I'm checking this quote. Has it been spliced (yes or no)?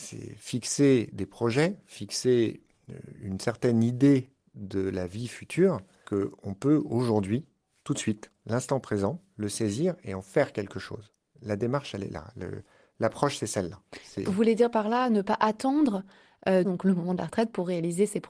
yes